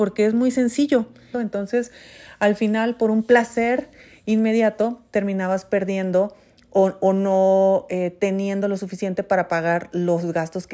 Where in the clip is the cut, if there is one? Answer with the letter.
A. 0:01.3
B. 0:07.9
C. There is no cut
A